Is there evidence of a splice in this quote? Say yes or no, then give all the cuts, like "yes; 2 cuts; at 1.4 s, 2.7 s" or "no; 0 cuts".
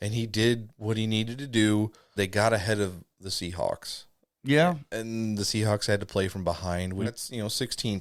yes; 2 cuts; at 2.2 s, 7.0 s